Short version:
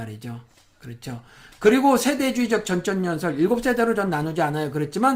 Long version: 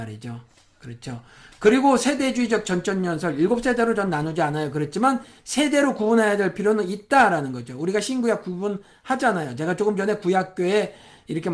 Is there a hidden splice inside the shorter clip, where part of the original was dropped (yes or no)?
no